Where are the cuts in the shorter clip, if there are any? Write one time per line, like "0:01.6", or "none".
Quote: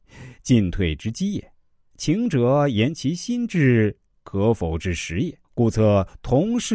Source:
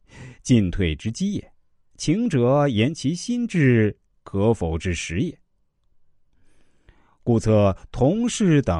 0:05.4